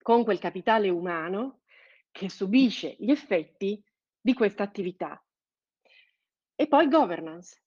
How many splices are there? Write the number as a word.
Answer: one